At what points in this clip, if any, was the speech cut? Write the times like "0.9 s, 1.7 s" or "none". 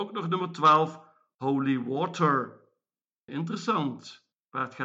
3.3 s